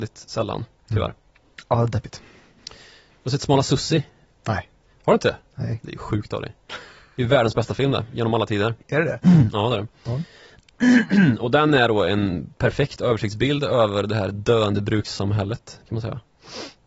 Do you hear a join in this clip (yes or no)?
no